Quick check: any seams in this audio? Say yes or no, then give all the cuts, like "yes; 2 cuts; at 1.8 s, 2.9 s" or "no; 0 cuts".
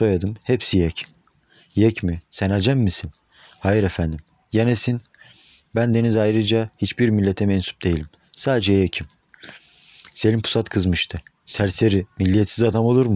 no; 0 cuts